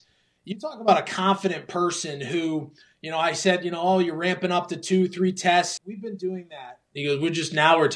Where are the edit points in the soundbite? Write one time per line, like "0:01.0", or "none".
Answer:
0:05.8